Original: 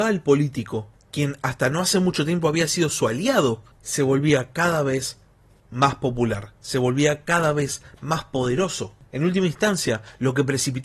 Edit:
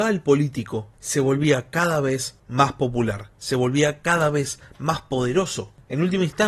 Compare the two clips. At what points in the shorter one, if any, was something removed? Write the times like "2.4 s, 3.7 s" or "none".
1.0 s, 2.4 s